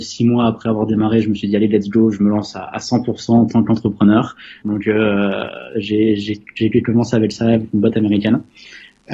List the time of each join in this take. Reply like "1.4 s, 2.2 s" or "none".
4.6 s